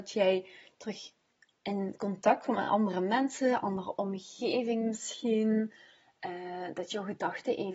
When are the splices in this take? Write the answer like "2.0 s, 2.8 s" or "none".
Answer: none